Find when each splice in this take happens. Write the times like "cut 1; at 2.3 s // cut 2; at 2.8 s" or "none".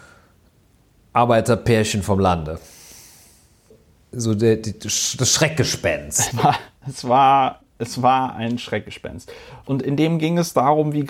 cut 1; at 6.3 s // cut 2; at 9.6 s